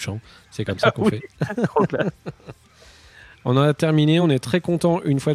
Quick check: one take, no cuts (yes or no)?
yes